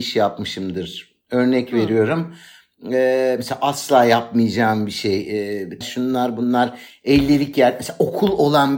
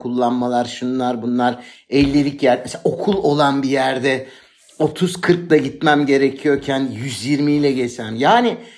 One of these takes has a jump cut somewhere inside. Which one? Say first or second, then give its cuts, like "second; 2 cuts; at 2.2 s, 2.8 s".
first; 1 cut; at 5.8 s